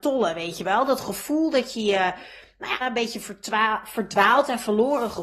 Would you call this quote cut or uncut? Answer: cut